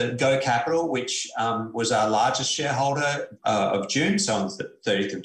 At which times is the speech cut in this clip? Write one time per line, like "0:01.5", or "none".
0:03.4